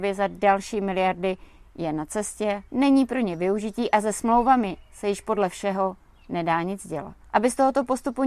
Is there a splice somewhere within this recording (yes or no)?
yes